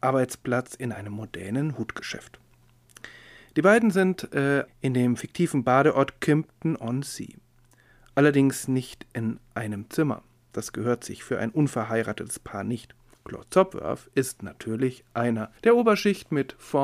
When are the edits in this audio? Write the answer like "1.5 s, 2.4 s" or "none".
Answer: 4.7 s, 13.1 s, 15.6 s